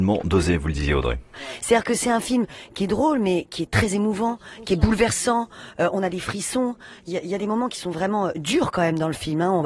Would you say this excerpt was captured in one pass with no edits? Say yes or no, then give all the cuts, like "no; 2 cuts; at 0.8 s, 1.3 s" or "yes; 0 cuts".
no; 1 cut; at 7.1 s